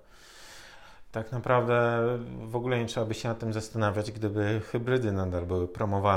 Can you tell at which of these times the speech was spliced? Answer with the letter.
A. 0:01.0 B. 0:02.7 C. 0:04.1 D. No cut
D